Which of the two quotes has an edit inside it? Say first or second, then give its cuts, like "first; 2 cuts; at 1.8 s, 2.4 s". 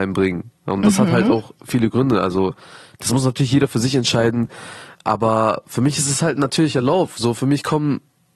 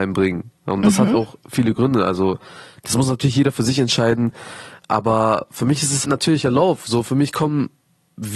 second; 2 cuts; at 1.1 s, 6.0 s